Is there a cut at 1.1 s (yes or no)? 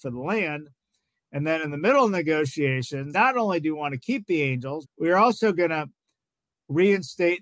no